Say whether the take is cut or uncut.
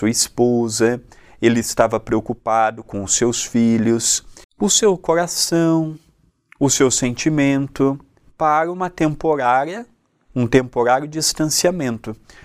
cut